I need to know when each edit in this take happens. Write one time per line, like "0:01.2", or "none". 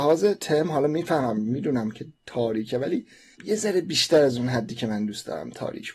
0:03.4

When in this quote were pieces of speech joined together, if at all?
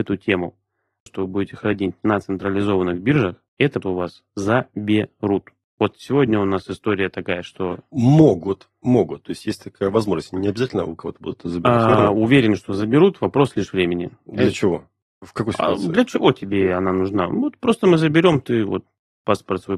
0:01.1
0:03.8

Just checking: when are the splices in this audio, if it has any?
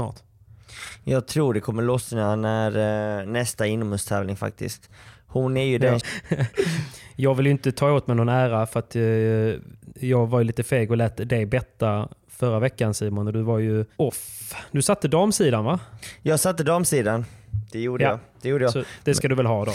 0:06.0

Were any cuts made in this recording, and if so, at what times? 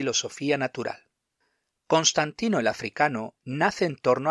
none

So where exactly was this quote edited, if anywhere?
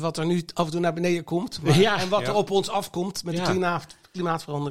none

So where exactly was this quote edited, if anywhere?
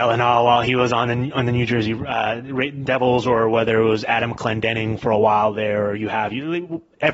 none

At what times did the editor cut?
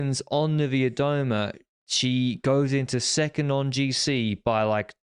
none

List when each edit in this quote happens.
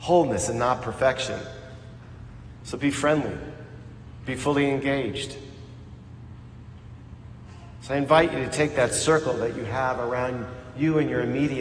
0:02.6

